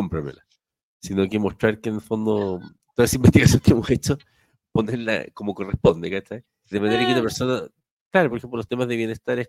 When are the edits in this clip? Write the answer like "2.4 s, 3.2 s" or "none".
6.7 s, 8.3 s